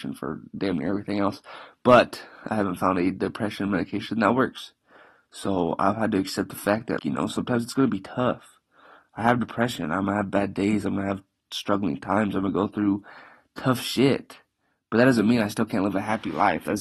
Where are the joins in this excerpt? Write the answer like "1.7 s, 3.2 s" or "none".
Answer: 7.0 s